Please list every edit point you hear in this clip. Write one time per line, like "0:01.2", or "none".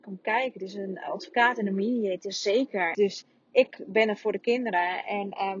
0:02.9